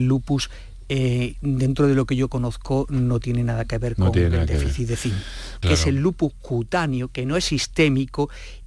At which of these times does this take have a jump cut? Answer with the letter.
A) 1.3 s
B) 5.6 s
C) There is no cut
B